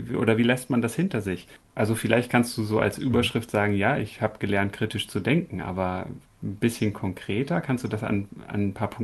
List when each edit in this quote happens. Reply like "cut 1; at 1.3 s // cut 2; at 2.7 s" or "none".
none